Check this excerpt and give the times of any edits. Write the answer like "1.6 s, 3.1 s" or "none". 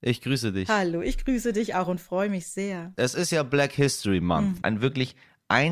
2.9 s, 4.6 s